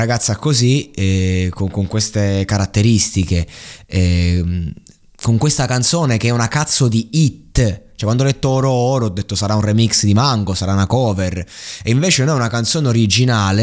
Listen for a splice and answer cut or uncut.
uncut